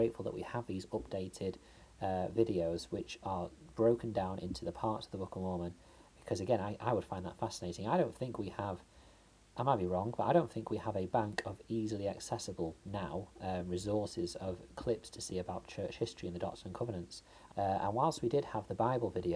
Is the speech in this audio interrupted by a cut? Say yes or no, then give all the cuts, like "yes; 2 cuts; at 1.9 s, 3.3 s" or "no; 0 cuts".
yes; 2 cuts; at 6.1 s, 17.5 s